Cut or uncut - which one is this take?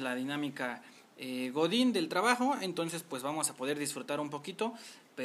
uncut